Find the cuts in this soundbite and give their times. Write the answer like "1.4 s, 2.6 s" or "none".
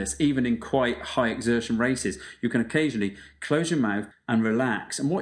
4.1 s